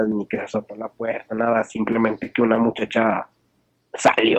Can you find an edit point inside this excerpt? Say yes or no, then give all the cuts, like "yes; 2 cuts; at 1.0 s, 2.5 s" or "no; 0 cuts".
no; 0 cuts